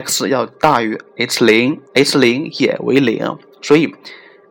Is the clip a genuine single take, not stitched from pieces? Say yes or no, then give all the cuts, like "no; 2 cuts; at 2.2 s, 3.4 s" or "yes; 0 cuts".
no; 1 cut; at 1.8 s